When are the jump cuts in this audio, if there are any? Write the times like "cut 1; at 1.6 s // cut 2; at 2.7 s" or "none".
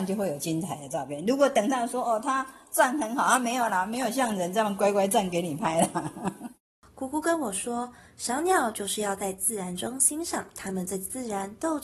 none

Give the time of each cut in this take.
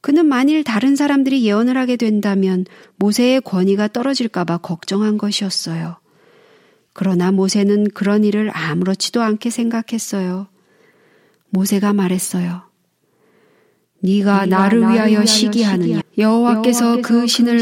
cut 1; at 16.0 s

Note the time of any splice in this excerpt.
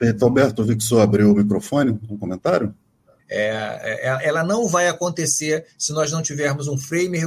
cut 1; at 3.2 s

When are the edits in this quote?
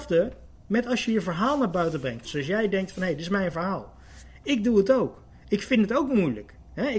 cut 1; at 2.2 s

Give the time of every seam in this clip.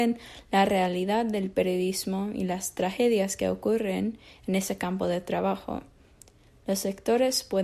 none

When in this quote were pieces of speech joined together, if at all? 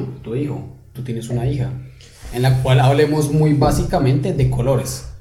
cut 1; at 0.9 s // cut 2; at 2.3 s

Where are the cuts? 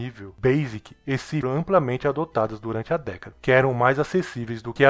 cut 1; at 1.4 s

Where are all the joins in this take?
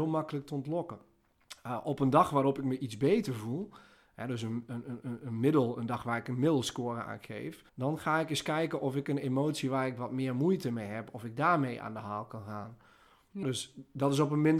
cut 1; at 7.7 s // cut 2; at 13.4 s

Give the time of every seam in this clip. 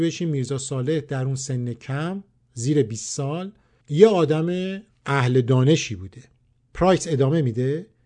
none

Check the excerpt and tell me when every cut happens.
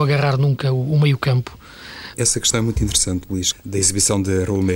cut 1; at 2.1 s // cut 2; at 3.5 s

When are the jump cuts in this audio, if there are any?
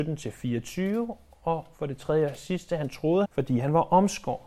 cut 1; at 3.2 s

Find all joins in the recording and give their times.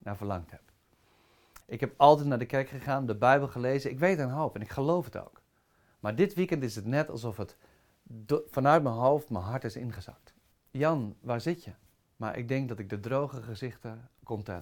cut 1; at 1.6 s // cut 2; at 10.5 s // cut 3; at 12.0 s

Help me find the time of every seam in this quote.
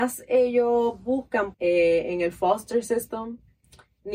cut 1; at 1.5 s

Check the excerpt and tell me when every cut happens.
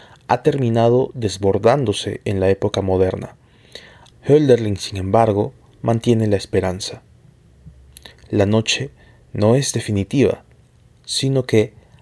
cut 1; at 4.1 s

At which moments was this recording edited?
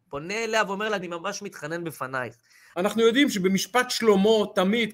cut 1; at 1.0 s // cut 2; at 2.7 s

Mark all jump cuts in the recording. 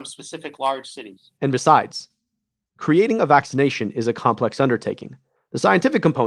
cut 1; at 5.4 s

